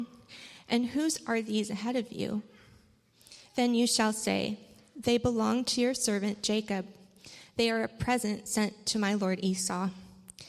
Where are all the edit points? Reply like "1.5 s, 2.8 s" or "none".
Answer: none